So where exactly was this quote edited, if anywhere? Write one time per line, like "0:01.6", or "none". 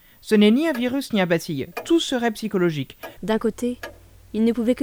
0:03.2